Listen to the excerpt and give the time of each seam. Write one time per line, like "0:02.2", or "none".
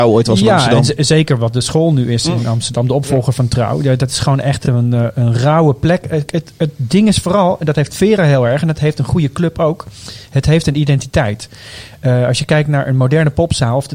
none